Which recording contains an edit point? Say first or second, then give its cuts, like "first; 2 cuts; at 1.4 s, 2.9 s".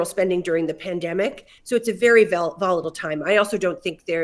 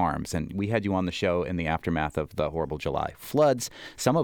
first; 1 cut; at 1.6 s